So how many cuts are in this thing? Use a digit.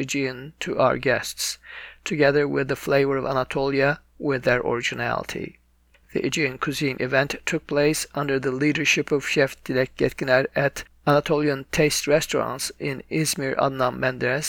0